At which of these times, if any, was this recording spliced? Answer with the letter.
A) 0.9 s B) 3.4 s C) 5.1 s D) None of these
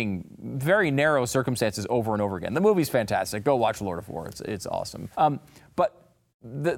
C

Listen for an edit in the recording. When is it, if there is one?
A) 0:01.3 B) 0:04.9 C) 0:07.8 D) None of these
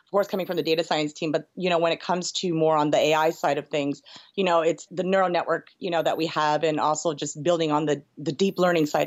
B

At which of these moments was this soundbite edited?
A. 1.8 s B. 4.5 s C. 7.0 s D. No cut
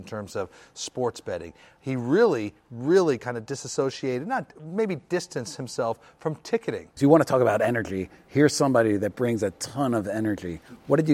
C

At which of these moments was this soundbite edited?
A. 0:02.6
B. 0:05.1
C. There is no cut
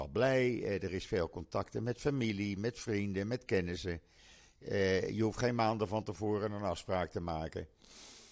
C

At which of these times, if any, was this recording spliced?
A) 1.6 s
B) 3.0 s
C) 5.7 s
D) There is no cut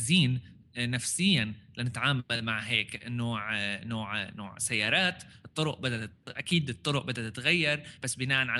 D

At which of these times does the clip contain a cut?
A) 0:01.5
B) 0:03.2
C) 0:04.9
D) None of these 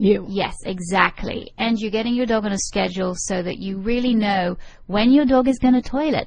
D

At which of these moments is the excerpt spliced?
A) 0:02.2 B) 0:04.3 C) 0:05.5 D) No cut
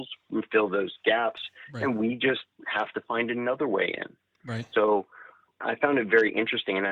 D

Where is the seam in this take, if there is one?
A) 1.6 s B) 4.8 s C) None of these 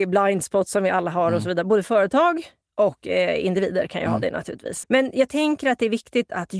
B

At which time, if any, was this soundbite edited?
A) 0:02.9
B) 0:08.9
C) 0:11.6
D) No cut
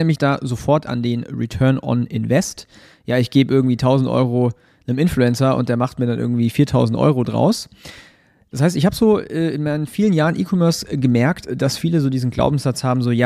D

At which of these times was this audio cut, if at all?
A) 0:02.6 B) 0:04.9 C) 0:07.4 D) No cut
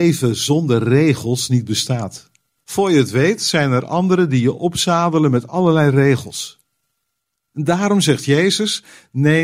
A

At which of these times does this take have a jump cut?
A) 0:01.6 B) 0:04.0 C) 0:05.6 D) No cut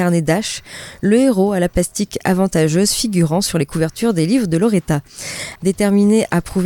C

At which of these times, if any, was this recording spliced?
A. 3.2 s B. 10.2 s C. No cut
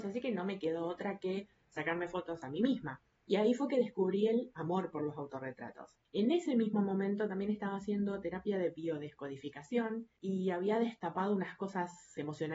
B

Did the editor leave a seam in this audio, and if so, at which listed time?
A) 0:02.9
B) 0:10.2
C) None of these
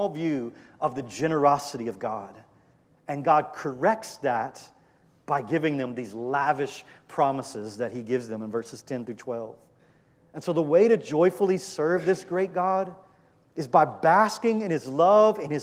C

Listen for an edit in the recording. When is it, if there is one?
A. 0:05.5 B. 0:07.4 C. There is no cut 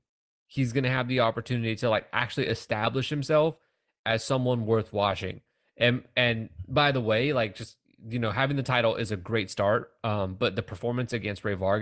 C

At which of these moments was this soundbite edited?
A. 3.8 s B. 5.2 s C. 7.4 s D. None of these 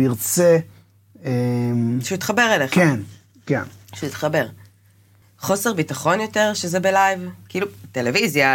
B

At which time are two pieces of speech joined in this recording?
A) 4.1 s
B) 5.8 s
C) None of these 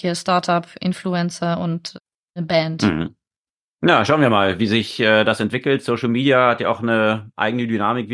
C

